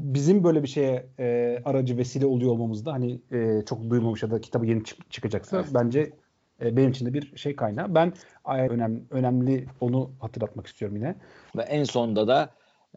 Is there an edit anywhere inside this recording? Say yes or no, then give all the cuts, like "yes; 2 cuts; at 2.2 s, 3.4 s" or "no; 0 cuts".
yes; 2 cuts; at 8.7 s, 11.5 s